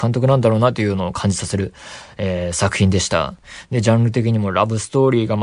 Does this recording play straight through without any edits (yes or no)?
yes